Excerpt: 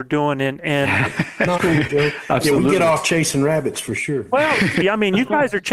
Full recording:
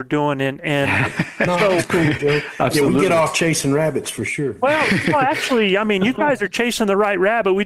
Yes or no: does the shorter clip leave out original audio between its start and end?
yes